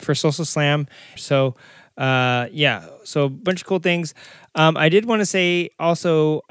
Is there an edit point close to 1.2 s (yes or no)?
yes